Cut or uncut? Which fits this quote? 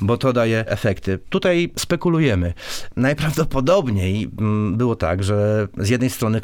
uncut